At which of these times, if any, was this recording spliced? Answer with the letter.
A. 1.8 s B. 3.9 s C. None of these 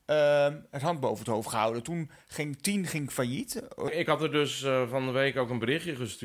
B